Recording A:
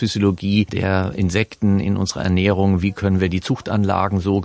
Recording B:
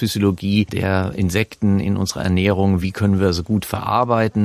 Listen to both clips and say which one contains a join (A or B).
A